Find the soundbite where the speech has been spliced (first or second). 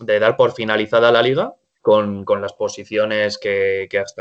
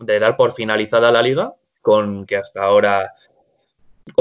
second